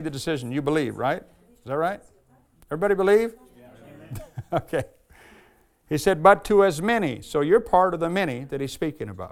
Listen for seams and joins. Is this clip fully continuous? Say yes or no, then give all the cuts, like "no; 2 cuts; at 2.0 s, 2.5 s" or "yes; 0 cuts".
yes; 0 cuts